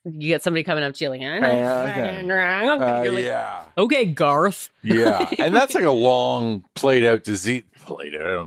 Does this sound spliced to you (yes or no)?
no